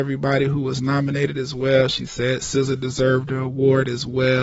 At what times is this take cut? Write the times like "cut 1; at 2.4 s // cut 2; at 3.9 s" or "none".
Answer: none